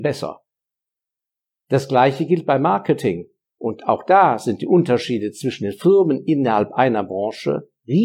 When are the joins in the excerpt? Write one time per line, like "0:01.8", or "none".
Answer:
0:03.4